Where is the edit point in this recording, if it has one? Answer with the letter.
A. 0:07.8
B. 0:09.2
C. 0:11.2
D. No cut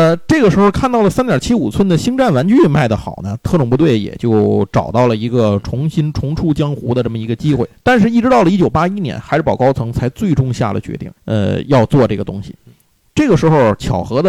C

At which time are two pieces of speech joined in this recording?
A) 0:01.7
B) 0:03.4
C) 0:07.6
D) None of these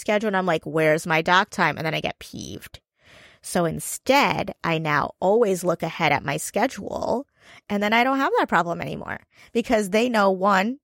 C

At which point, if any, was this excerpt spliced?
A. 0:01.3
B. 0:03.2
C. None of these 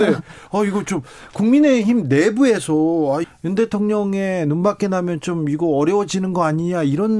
B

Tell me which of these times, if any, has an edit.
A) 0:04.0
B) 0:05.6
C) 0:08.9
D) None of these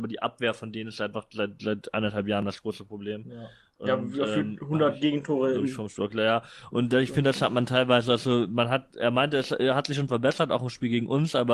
D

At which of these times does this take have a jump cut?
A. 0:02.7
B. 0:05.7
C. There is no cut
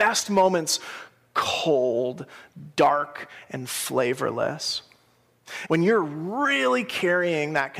B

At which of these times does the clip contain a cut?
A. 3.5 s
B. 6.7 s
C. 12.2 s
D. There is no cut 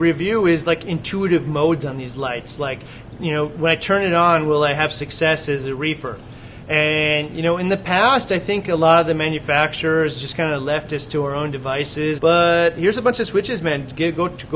C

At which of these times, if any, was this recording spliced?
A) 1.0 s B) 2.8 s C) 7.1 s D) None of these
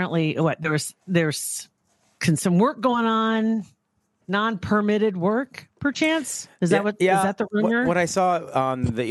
D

